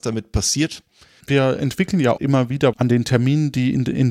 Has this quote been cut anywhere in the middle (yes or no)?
yes